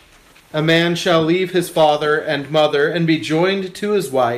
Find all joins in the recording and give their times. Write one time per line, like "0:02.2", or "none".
none